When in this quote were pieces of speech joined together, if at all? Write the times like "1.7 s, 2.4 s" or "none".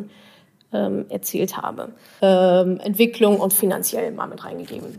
2.2 s